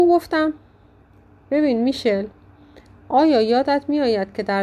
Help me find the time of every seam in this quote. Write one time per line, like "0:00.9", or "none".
none

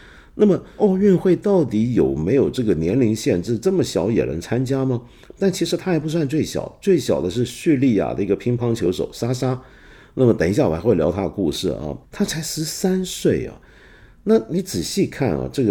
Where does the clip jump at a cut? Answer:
0:12.0

